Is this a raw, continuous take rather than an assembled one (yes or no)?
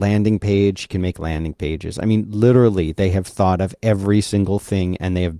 yes